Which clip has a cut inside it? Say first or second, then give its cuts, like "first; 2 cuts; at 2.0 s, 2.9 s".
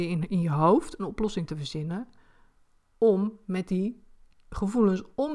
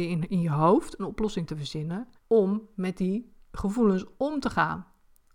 second; 2 cuts; at 2.2 s, 3.4 s